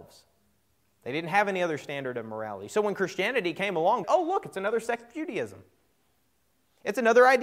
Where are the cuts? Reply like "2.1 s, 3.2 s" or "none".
4.0 s